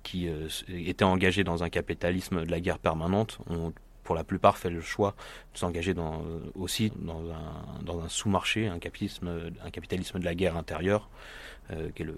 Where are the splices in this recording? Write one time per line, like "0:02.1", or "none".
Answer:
0:06.9